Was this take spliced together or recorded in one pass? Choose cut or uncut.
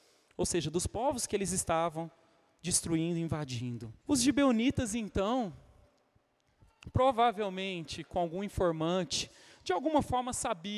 cut